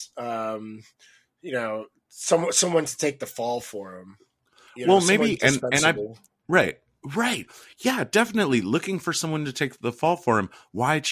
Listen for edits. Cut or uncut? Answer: uncut